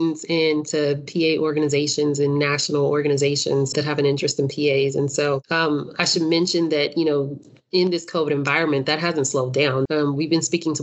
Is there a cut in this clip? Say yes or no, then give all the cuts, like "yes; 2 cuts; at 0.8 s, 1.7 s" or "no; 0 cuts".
yes; 2 cuts; at 3.7 s, 9.9 s